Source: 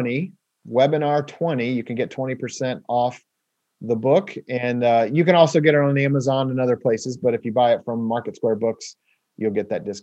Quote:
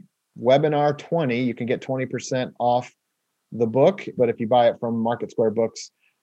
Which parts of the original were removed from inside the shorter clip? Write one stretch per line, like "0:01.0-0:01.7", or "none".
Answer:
0:04.4-0:07.2